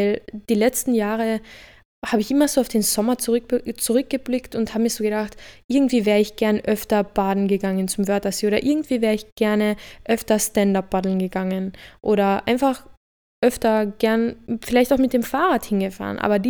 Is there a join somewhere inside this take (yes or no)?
no